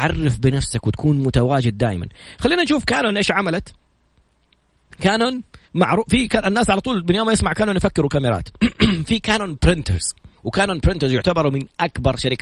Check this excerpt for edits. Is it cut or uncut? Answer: cut